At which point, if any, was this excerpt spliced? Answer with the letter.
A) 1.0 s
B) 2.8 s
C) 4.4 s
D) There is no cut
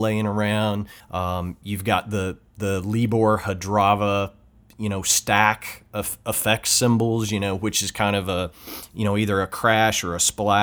A